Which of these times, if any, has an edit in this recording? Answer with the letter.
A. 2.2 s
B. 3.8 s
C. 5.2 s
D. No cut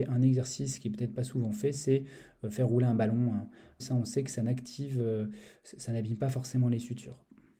B